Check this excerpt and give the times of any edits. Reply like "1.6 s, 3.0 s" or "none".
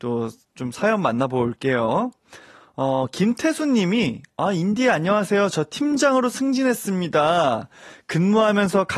none